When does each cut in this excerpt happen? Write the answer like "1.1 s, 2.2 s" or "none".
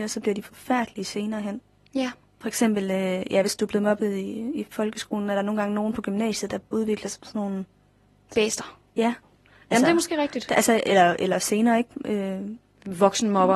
none